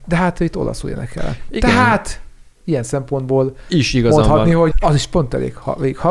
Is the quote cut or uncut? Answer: cut